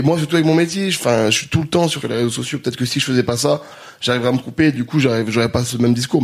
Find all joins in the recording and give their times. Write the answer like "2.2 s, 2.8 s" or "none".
2.0 s